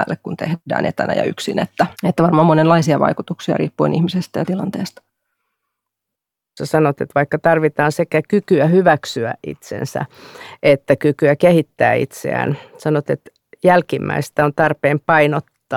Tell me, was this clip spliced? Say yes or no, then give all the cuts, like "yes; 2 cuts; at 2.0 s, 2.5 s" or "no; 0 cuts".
yes; 1 cut; at 1.9 s